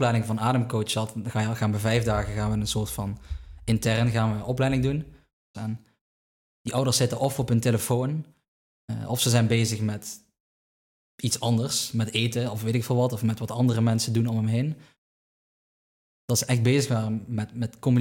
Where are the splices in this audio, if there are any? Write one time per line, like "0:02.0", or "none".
0:05.5
0:16.1